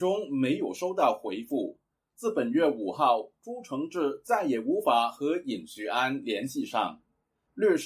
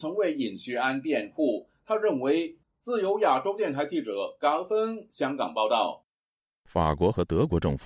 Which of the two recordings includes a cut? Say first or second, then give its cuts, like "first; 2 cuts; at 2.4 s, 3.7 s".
second; 1 cut; at 2.6 s